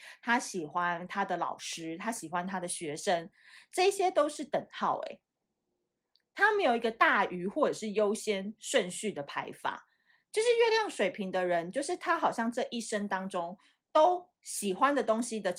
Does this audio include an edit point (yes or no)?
no